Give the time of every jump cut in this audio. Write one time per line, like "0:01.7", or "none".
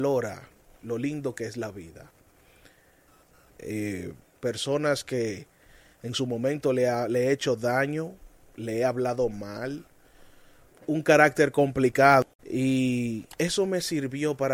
0:04.2
0:10.7
0:12.4